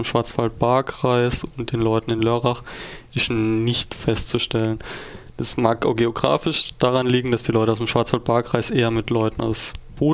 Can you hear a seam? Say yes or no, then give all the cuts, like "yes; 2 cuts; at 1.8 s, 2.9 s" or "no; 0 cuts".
no; 0 cuts